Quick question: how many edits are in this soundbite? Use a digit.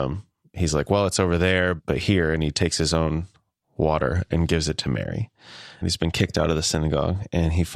2